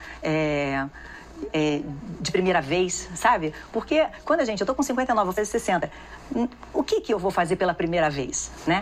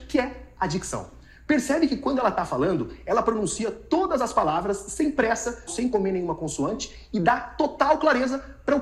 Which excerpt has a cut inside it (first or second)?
second